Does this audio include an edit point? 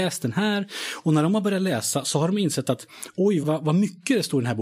yes; 1 cut; at 3.4 s

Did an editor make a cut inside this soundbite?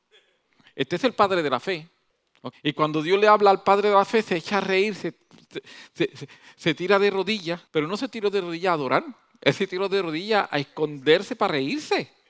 yes; 2 cuts; at 2.5 s, 7.7 s

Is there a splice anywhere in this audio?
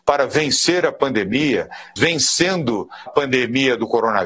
yes; 2 cuts; at 2.0 s, 3.1 s

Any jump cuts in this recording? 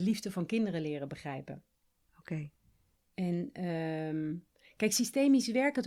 no; 0 cuts

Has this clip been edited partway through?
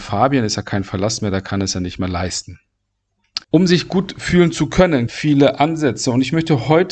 yes; 2 cuts; at 3.4 s, 5.1 s

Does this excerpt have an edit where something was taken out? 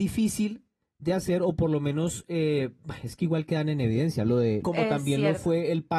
yes; 1 cut; at 4.6 s

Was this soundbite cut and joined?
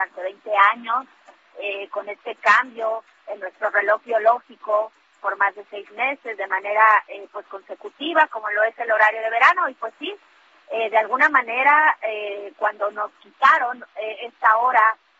no; 0 cuts

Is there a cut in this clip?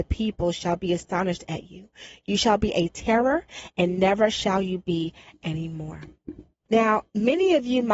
yes; 1 cut; at 6.7 s

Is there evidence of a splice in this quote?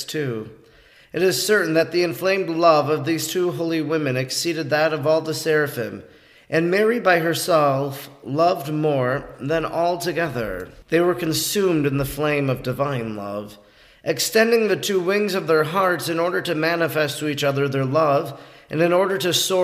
no; 0 cuts

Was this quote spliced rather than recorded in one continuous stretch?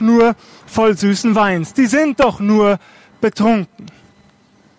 no; 0 cuts

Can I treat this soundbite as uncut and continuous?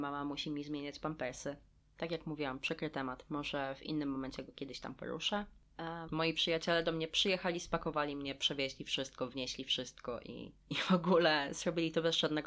no; 1 cut; at 6.1 s

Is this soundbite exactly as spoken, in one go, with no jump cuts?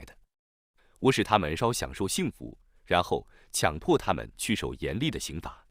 no; 1 cut; at 1.6 s

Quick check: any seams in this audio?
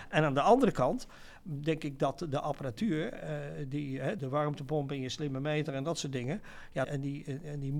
yes; 2 cuts; at 4.2 s, 6.8 s

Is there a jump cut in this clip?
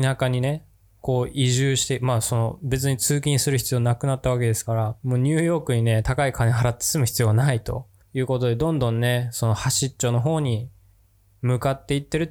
no; 0 cuts

